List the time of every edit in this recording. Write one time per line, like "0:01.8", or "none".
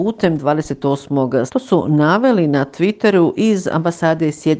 0:01.5